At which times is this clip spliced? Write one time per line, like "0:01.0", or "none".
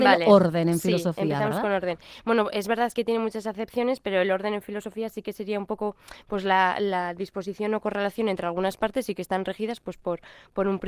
0:02.9